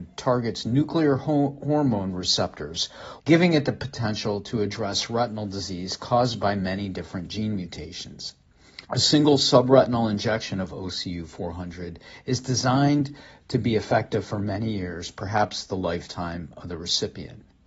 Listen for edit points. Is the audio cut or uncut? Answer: cut